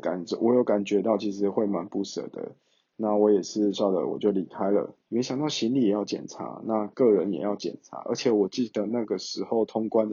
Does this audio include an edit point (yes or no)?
yes